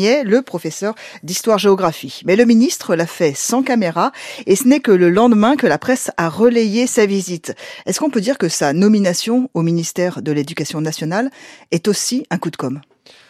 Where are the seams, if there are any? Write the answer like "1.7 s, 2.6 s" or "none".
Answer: 7.8 s

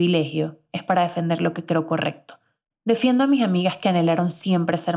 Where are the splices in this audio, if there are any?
2.7 s

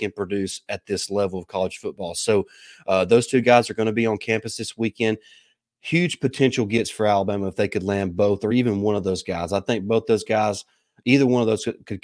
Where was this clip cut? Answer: none

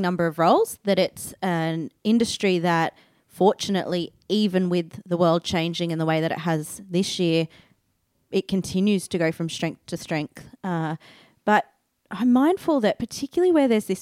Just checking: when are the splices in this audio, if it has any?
none

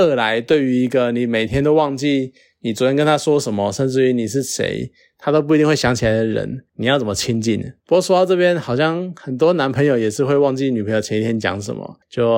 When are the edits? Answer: none

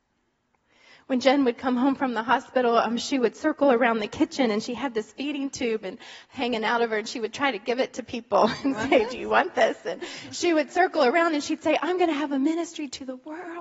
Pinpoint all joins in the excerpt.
none

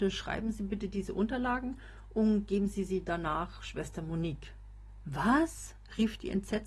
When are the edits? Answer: 5.0 s

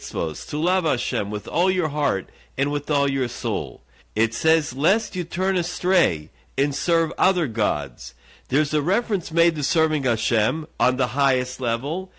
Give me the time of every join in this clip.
4.0 s

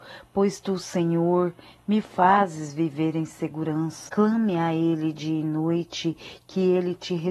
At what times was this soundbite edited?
4.1 s

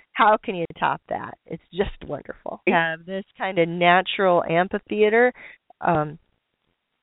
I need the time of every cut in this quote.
2.7 s

